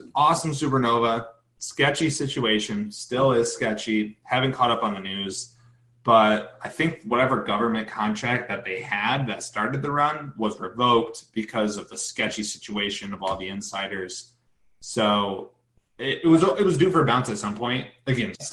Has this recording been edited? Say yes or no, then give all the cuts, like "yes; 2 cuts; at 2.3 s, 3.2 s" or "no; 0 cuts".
no; 0 cuts